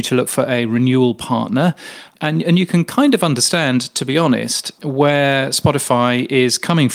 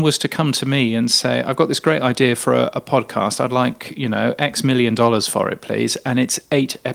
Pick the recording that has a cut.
first; 2 cuts; at 2.1 s, 4.8 s

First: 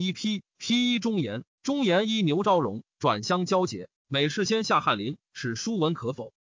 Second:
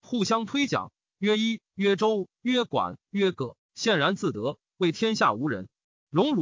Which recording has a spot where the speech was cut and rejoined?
first; 1 cut; at 4.0 s

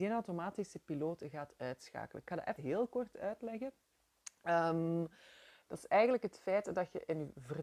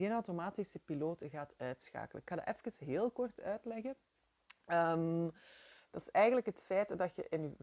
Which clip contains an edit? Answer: first; 1 cut; at 2.6 s

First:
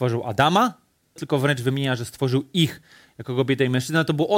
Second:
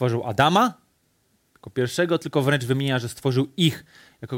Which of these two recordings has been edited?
first; 1 cut; at 1.2 s

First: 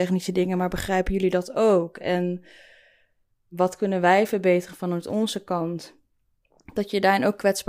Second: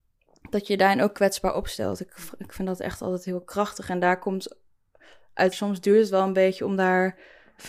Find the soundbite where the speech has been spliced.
second; 1 cut; at 5.5 s

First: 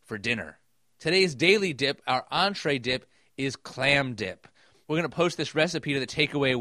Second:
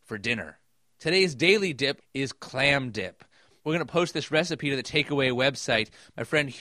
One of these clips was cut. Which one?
second; 1 cut; at 2.0 s

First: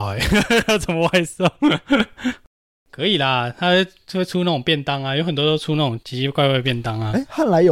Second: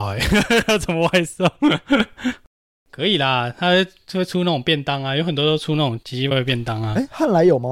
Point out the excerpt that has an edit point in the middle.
second; 1 cut; at 6.3 s

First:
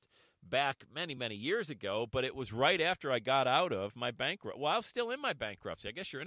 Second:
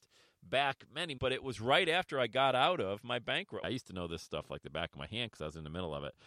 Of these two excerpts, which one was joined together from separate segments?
second; 2 cuts; at 1.2 s, 3.6 s

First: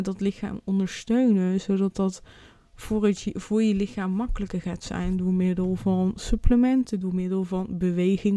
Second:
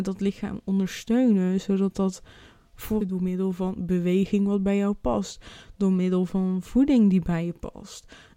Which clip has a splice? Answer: second; 1 cut; at 3.0 s

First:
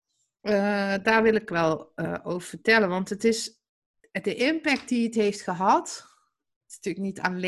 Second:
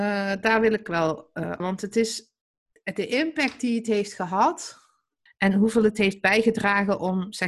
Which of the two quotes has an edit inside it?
second; 2 cuts; at 1.6 s, 5.3 s

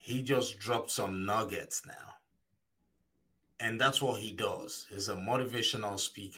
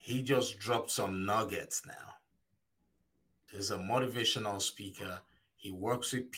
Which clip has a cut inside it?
second; 1 cut; at 3.5 s

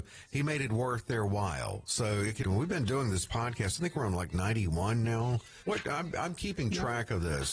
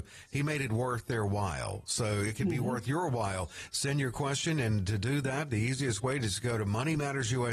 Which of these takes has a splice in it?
first; 2 cuts; at 2.4 s, 5.6 s

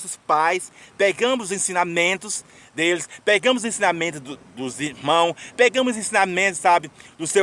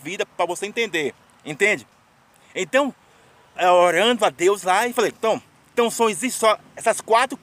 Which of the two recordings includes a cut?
second; 1 cut; at 3.6 s

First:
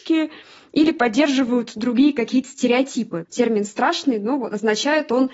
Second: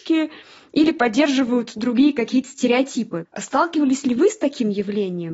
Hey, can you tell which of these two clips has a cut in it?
first; 1 cut; at 3.3 s

